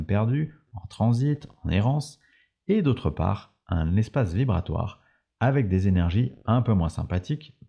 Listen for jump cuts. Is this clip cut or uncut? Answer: uncut